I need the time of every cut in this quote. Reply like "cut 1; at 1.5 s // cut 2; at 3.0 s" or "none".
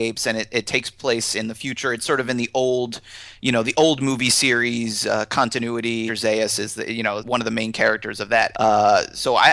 cut 1; at 6.1 s // cut 2; at 7.2 s // cut 3; at 8.5 s